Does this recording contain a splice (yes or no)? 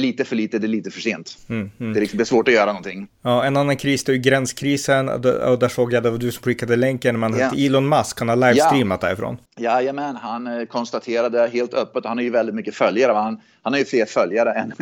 yes